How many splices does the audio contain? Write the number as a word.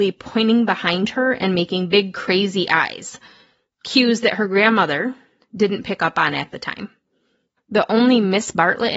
one